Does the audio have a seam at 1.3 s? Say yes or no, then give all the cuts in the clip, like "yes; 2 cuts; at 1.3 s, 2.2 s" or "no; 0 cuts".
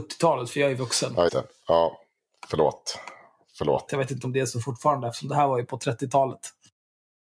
yes; 2 cuts; at 1.3 s, 3.9 s